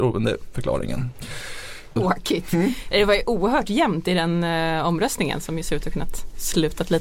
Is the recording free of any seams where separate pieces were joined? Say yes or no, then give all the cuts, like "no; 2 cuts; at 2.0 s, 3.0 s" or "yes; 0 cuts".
no; 1 cut; at 2.0 s